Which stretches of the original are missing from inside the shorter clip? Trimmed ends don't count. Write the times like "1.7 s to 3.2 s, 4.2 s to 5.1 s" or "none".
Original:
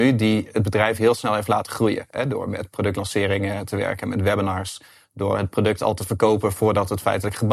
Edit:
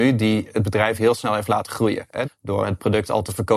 2.2 s to 5.0 s